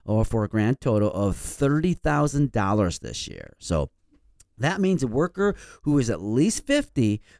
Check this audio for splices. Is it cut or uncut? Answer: uncut